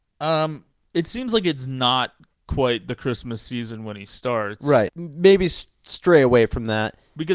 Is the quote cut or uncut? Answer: cut